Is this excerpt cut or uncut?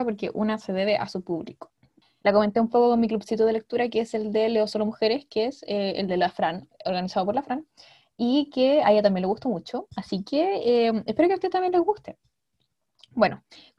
cut